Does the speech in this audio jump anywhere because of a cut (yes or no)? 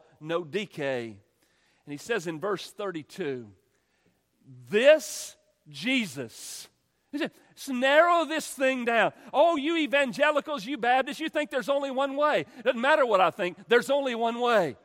no